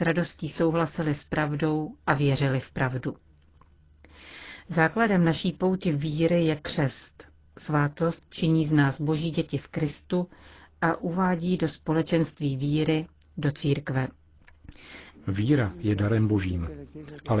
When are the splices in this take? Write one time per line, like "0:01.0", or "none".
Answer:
0:08.2
0:15.1